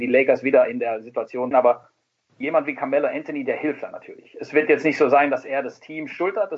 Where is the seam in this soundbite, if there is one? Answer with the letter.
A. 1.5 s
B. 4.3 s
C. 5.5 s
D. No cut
A